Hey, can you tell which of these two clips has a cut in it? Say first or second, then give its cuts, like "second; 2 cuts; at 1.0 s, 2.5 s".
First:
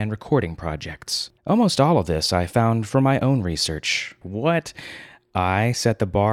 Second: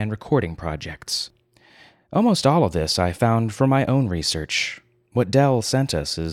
first; 2 cuts; at 1.4 s, 4.2 s